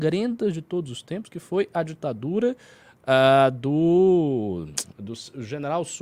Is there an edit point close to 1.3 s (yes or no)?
no